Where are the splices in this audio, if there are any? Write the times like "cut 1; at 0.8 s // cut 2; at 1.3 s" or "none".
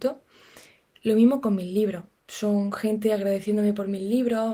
cut 1; at 0.9 s // cut 2; at 2.2 s